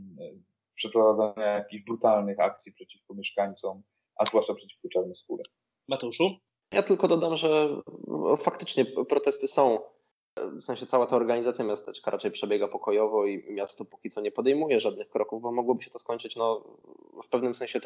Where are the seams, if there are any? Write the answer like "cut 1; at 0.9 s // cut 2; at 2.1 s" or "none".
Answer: none

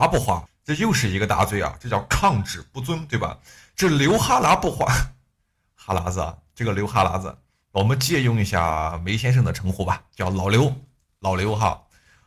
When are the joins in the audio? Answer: none

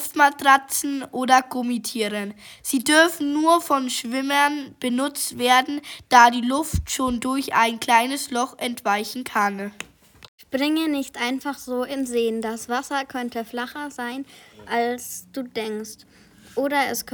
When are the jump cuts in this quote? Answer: none

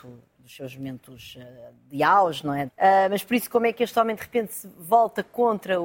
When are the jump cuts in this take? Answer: cut 1; at 2.7 s

